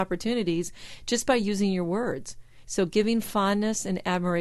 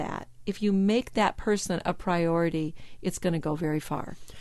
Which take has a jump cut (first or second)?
first